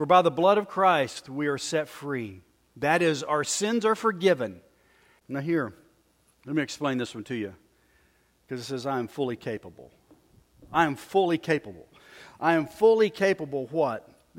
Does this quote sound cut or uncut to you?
cut